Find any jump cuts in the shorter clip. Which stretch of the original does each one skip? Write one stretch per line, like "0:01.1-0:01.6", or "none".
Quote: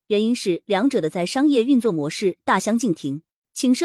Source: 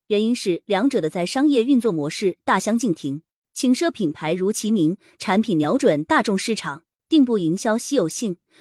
none